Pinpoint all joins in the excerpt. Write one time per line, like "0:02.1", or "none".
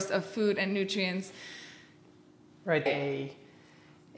0:02.9